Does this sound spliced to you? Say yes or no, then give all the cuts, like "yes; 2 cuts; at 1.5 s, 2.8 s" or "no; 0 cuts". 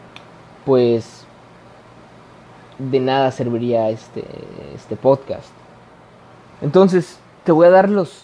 no; 0 cuts